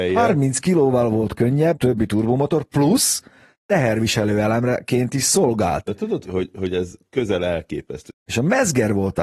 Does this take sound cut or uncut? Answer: cut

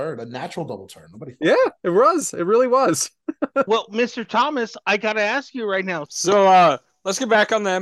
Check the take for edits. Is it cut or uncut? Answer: cut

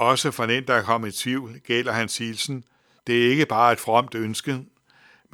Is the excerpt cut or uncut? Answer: cut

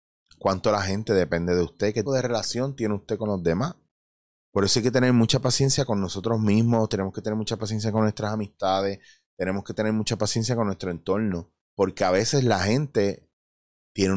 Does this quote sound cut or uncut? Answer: cut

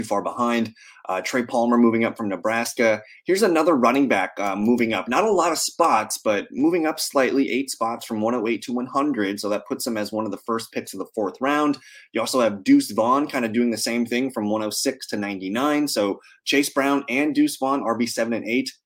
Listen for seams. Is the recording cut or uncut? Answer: uncut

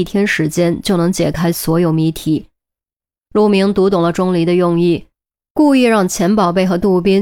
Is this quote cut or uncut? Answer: uncut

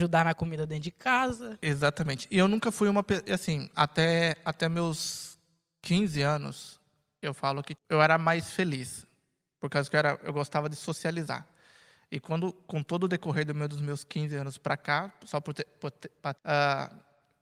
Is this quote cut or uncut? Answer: cut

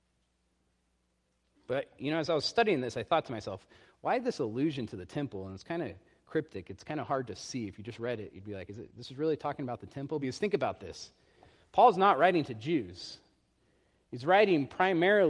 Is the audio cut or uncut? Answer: uncut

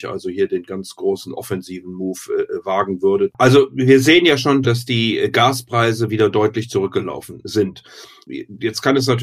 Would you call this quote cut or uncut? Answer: cut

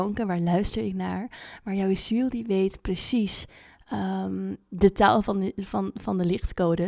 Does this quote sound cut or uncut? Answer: uncut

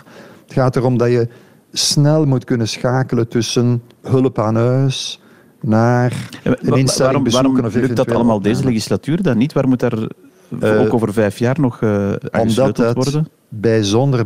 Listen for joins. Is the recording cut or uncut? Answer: uncut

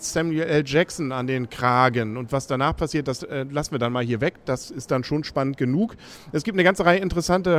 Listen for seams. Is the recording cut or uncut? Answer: uncut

